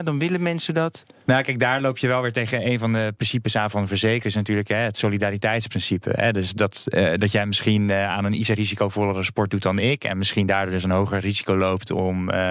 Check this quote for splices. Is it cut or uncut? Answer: uncut